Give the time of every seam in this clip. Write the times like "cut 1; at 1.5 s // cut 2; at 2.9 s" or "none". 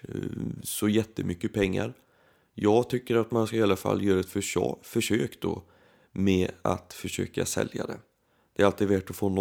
none